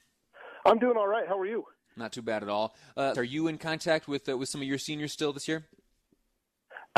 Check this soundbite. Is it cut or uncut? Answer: cut